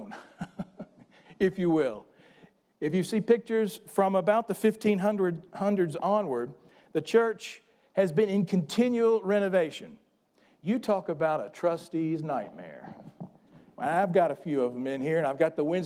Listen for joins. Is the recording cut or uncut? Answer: uncut